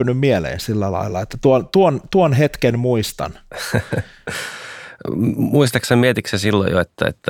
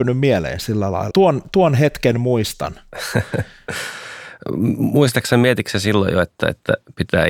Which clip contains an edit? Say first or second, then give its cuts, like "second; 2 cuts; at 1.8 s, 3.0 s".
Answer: second; 1 cut; at 1.1 s